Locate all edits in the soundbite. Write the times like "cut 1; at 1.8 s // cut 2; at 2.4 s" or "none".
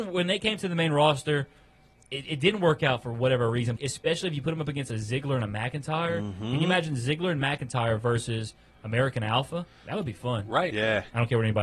cut 1; at 3.8 s // cut 2; at 10.7 s

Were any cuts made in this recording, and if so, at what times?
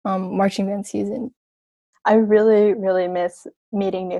cut 1; at 1.9 s

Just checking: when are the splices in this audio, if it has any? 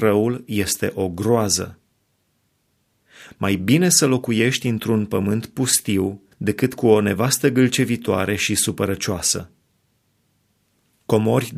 cut 1; at 3.3 s // cut 2; at 6.3 s

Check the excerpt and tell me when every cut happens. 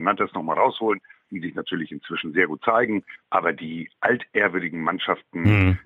cut 1; at 3.2 s

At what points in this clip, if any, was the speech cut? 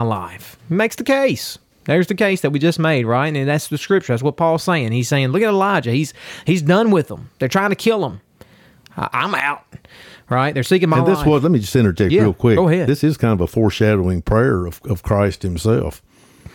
none

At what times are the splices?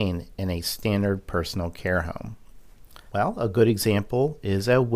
cut 1; at 3.1 s

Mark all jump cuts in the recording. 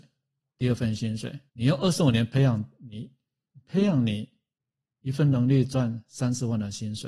cut 1; at 1.5 s

